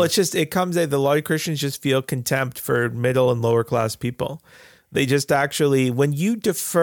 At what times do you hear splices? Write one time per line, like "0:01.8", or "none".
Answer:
none